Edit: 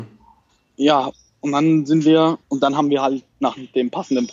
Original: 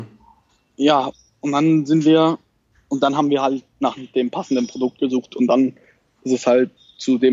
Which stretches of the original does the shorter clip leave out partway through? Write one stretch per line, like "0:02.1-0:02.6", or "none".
0:02.4-0:02.8